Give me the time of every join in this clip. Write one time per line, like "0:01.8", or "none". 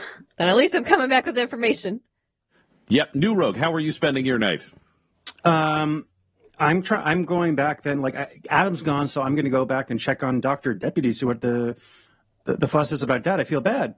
none